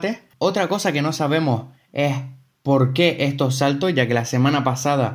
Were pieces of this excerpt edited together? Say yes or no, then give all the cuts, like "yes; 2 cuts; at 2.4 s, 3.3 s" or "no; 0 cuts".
no; 0 cuts